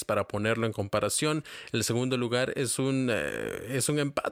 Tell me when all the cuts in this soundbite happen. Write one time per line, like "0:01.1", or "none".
none